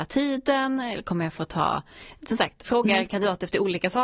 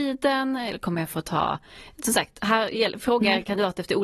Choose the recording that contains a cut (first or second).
first